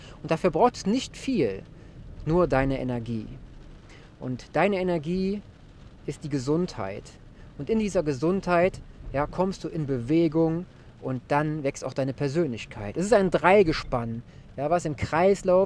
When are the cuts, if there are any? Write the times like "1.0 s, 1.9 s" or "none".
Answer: none